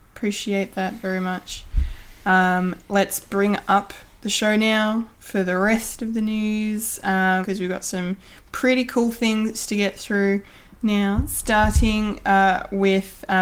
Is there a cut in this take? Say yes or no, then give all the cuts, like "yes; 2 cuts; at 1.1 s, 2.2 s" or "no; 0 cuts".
yes; 1 cut; at 7.4 s